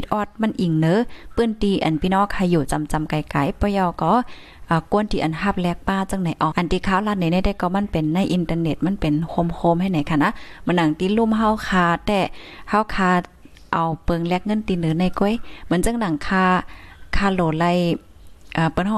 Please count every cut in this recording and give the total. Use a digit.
1